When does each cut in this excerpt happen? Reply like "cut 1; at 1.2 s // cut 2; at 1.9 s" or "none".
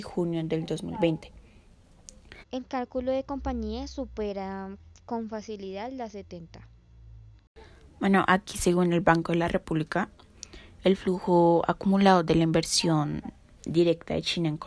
cut 1; at 2.4 s